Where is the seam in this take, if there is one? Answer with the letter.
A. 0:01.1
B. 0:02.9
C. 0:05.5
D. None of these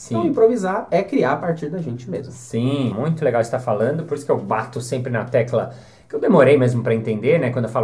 B